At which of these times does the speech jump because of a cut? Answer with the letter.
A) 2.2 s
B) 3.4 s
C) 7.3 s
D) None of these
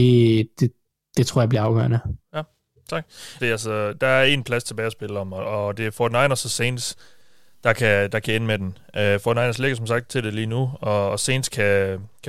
B